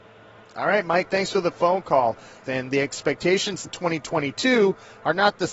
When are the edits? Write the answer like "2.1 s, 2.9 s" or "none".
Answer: 2.5 s, 3.6 s